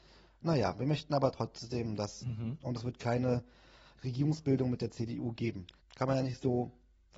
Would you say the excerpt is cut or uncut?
cut